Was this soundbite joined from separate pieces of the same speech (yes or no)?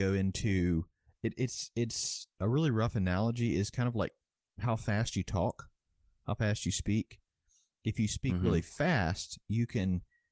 yes